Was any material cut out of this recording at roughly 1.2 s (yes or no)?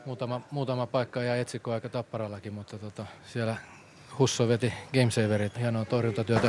no